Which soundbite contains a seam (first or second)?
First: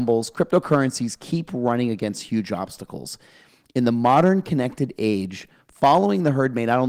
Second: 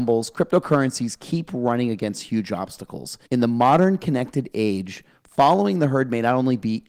second